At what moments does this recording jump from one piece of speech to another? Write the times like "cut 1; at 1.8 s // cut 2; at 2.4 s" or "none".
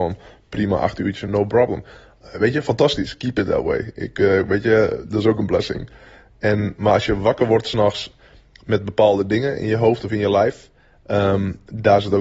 cut 1; at 1.2 s